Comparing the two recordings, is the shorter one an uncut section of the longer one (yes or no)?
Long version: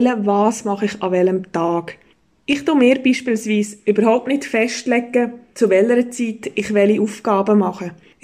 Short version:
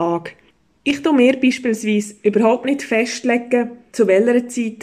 yes